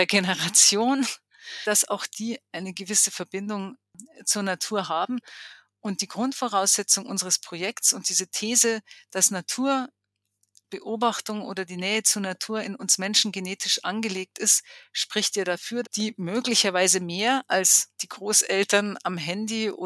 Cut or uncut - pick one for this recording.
cut